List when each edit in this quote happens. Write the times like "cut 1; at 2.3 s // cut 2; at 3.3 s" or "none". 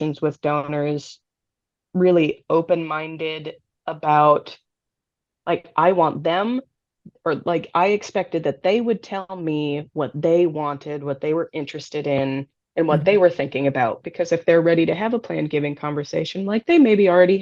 none